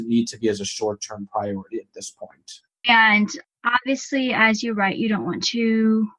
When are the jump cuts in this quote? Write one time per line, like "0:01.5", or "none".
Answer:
0:02.8